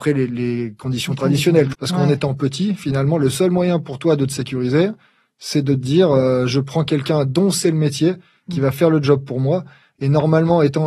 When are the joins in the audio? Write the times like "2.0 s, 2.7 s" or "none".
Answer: 1.7 s